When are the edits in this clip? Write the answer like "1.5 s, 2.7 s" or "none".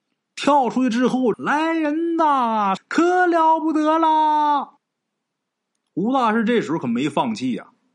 1.3 s, 2.8 s, 4.8 s